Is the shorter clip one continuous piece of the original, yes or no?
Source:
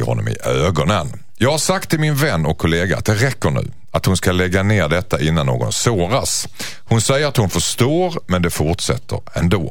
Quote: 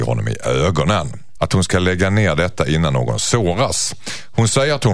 no